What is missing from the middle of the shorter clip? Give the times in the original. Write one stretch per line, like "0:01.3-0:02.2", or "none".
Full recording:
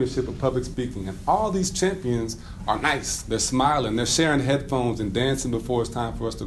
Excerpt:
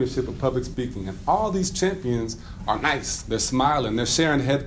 none